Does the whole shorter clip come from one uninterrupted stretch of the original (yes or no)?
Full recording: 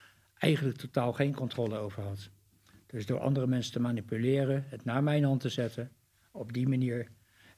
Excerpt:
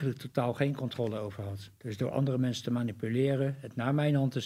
no